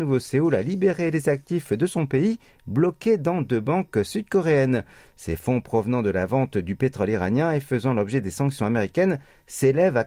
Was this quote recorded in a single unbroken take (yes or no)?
yes